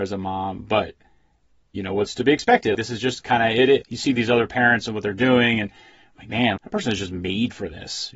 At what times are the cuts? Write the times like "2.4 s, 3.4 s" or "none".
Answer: 2.7 s, 3.8 s, 6.6 s